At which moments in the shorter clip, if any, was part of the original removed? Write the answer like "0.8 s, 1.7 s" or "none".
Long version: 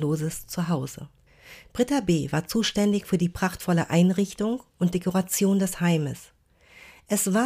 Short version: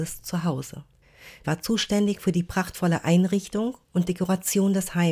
1.4 s